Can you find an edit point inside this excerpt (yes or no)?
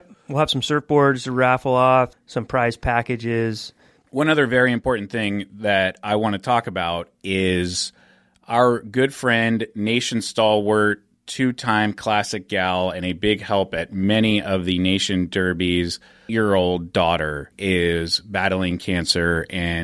yes